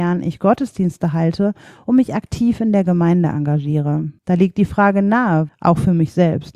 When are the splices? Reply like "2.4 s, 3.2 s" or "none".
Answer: 4.2 s, 5.5 s